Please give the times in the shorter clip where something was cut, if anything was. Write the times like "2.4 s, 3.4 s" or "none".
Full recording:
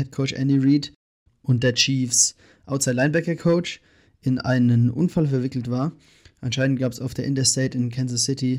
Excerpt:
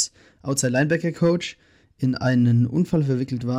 none